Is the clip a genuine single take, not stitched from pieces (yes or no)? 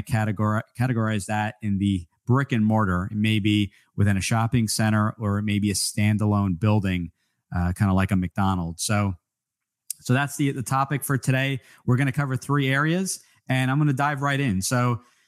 yes